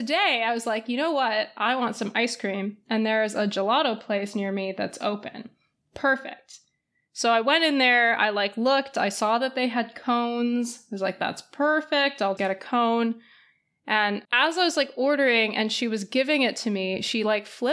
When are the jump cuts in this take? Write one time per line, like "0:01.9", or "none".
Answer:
0:12.4
0:14.2